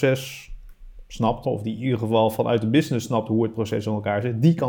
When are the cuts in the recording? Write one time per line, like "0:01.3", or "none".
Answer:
0:01.4

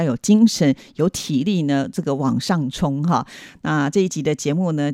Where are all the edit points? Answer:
0:03.6

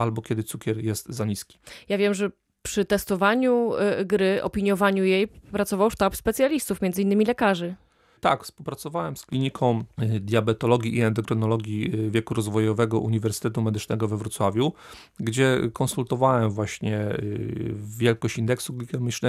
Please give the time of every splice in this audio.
none

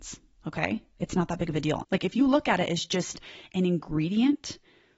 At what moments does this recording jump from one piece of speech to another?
0:01.8

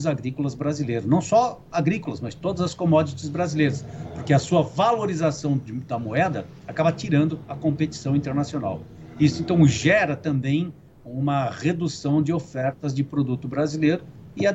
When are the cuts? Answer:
0:06.6

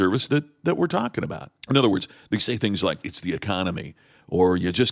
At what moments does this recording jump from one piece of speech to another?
0:01.6
0:03.0

